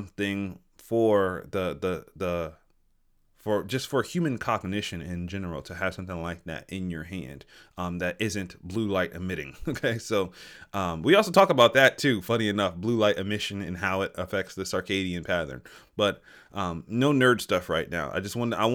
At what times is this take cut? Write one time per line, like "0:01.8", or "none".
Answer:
none